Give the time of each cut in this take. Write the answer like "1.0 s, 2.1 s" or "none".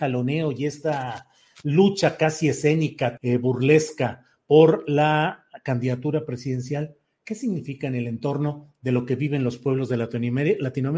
3.2 s